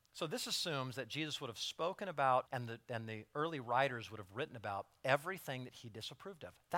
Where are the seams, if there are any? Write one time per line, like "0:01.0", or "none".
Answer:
0:02.5